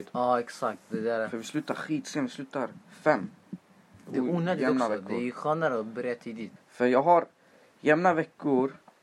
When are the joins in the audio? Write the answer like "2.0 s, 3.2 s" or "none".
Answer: 6.6 s